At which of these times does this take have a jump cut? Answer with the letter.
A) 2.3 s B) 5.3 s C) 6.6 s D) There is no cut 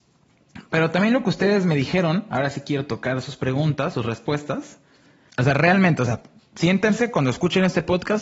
B